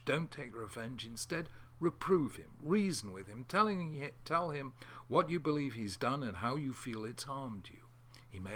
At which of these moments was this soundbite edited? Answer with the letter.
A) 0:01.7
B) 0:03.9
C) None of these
C